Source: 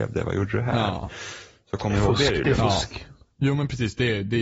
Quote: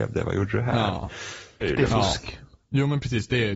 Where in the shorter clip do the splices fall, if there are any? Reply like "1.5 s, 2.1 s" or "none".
1.6 s